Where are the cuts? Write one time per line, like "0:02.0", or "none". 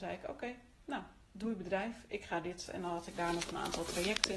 0:02.7

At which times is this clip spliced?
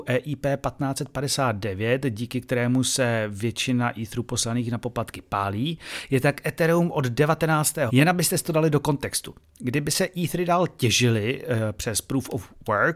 0:07.9

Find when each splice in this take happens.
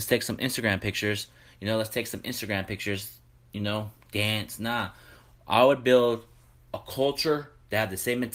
none

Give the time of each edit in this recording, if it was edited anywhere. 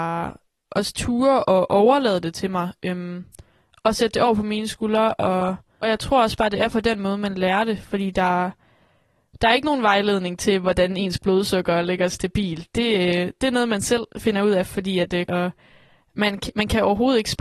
0:14.1
0:15.3
0:16.5

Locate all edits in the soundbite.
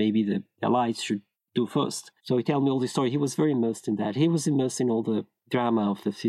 none

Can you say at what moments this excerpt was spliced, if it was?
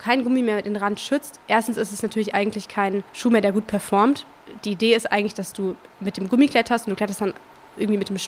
0:03.1

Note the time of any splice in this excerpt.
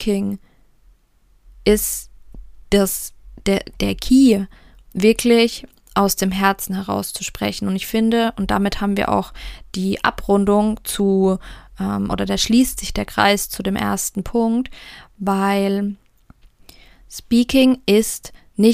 none

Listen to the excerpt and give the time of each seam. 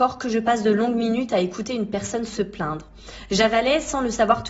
none

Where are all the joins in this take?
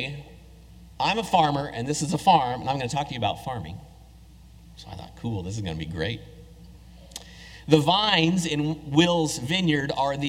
none

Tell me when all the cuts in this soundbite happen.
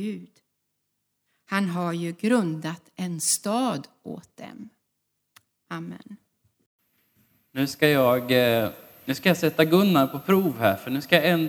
none

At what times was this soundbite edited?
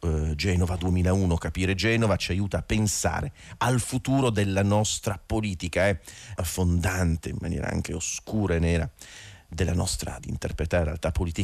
0:06.4
0:10.2

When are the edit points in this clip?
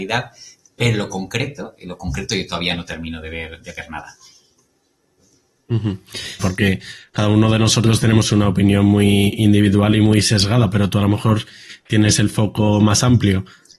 0:06.4

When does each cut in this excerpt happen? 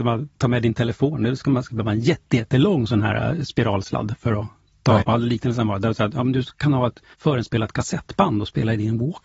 0:05.0
0:07.1

